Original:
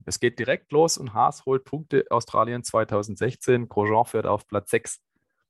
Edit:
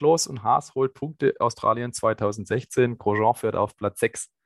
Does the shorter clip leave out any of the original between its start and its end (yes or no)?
no